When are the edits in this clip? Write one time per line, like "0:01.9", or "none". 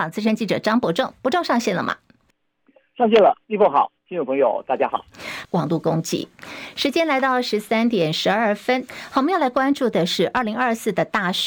0:05.4